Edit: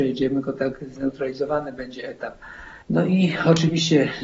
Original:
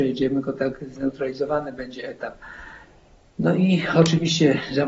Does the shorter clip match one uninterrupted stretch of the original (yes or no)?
no